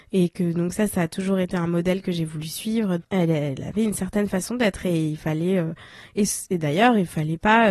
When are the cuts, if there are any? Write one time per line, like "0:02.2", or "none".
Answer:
0:03.0